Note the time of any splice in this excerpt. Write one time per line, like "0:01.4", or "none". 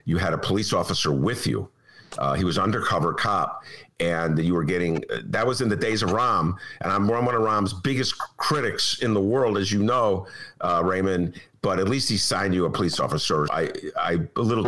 0:13.5

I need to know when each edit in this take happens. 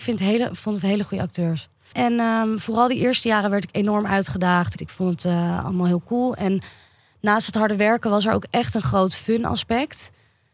0:01.9
0:04.8

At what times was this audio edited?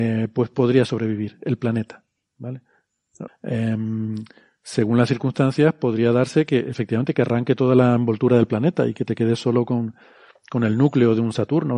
0:03.3

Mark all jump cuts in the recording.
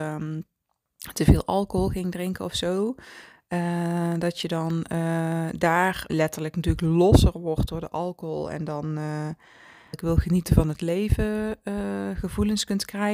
0:06.1
0:09.9

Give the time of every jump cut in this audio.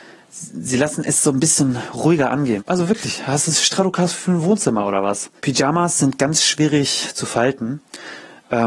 0:02.6
0:05.4

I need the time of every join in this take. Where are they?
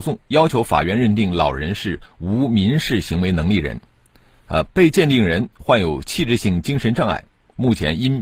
0:04.6

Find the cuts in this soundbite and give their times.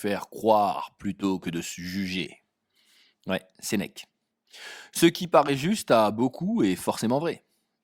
none

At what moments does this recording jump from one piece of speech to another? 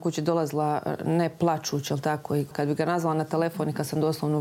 0:02.5

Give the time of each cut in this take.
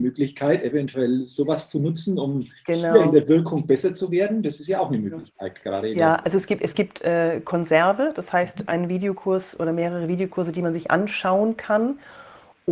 none

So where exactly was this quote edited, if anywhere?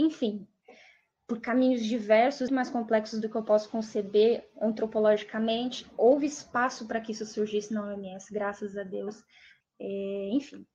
0:02.5
0:09.6

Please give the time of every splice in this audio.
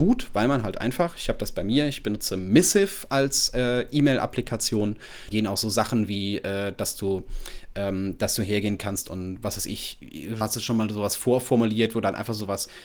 0:05.3
0:10.4

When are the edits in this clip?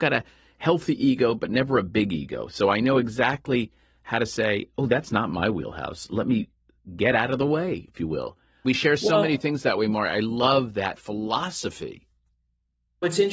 none

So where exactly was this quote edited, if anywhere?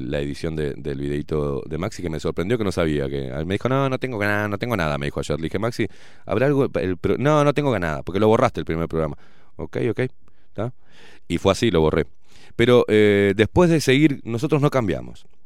none

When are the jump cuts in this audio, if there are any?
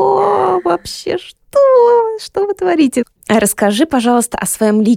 0:03.2

